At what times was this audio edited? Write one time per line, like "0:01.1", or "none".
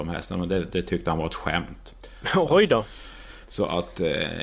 none